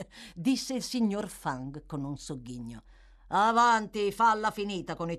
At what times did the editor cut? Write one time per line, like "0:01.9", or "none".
none